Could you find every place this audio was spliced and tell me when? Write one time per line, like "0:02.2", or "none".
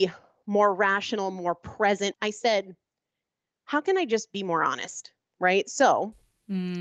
0:02.1